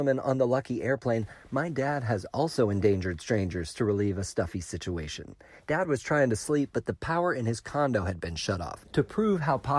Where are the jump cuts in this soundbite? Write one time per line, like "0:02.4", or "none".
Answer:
0:05.6
0:08.8